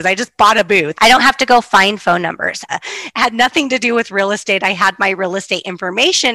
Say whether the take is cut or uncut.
cut